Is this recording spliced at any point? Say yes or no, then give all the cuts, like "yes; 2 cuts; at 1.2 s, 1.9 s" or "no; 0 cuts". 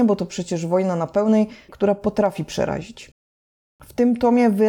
yes; 1 cut; at 1.7 s